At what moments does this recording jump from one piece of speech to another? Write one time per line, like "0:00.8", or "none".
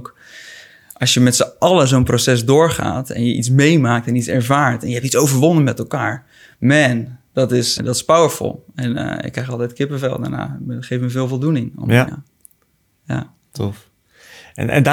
0:07.8
0:12.1

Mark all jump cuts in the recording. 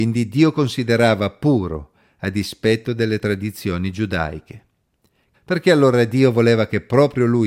0:05.3

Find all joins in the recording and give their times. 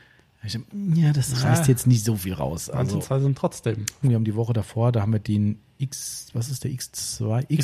0:04.0

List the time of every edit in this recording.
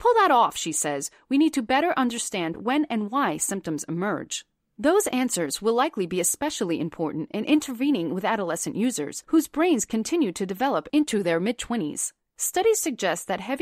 none

